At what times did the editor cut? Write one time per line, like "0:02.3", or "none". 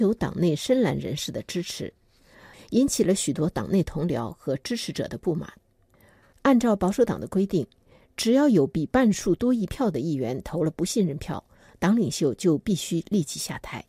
0:02.5
0:06.3